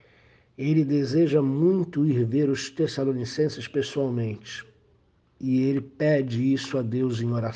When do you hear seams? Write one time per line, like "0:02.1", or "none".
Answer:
none

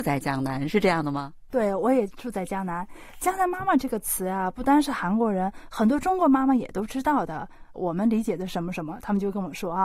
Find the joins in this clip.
0:07.7

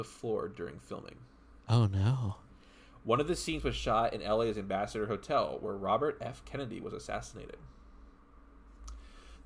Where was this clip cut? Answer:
none

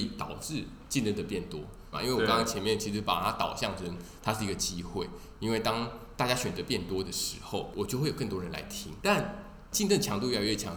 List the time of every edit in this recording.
0:01.9

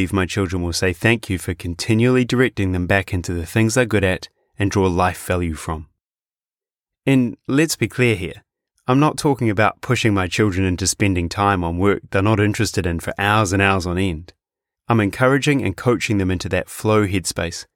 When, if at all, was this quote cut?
none

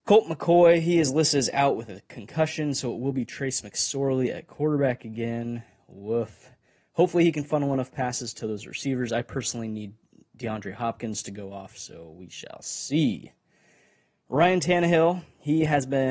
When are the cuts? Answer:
none

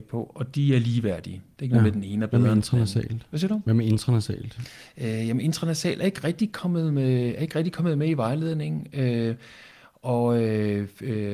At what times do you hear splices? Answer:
none

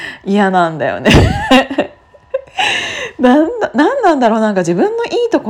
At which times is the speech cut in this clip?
none

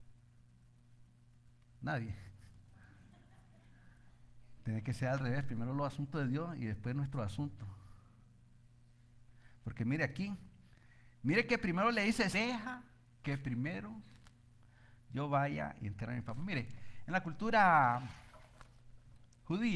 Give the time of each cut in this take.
0:12.3

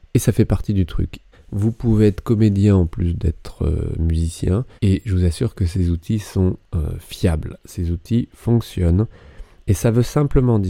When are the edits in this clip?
0:01.3
0:04.8

